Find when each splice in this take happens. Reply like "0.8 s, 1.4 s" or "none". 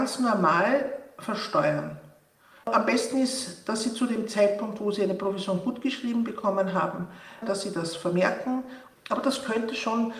2.6 s, 7.4 s, 8.9 s